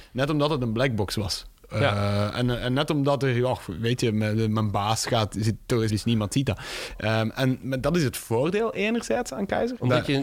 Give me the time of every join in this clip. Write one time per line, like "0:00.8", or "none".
0:05.9